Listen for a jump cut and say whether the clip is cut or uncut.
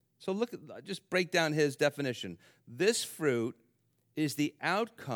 uncut